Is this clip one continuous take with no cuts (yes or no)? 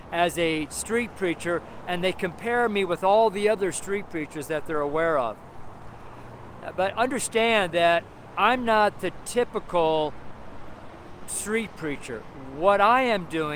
yes